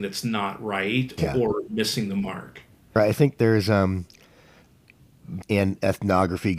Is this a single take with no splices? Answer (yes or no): no